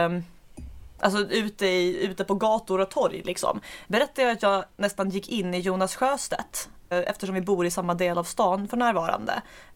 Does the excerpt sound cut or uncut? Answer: cut